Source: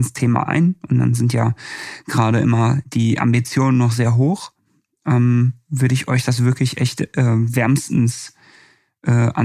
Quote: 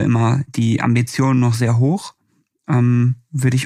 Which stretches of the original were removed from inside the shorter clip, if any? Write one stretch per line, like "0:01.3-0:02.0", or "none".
none